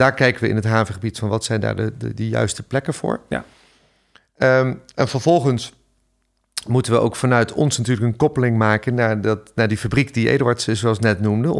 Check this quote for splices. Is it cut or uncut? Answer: uncut